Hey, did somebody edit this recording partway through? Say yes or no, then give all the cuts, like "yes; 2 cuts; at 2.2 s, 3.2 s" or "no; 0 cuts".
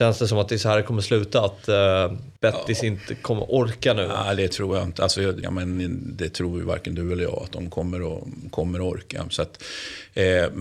yes; 2 cuts; at 2.4 s, 5.4 s